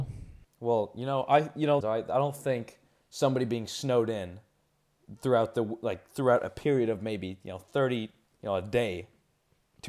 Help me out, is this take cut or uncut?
cut